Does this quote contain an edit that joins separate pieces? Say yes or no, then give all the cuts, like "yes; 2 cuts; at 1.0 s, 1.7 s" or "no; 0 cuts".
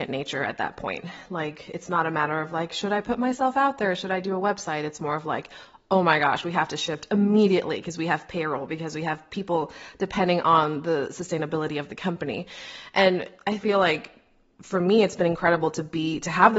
no; 0 cuts